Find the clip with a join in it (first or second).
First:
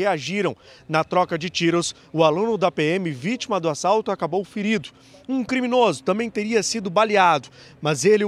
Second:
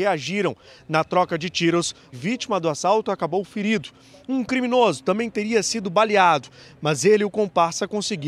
second